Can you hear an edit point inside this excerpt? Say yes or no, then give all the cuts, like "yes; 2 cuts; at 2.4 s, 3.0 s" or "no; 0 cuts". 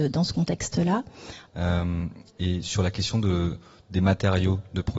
yes; 1 cut; at 1.5 s